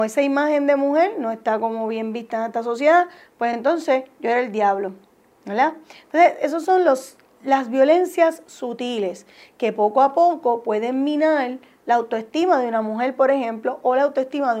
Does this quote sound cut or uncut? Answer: uncut